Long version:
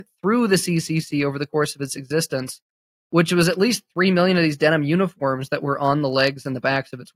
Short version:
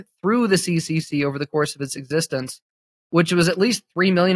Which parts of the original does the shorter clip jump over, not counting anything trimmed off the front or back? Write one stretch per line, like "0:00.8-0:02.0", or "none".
none